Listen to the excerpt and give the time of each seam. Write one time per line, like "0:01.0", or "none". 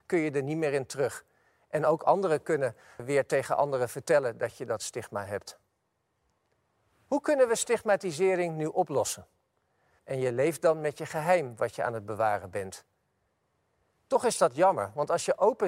0:03.0
0:10.0